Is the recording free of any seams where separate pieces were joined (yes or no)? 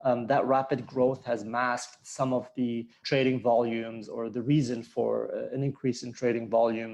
yes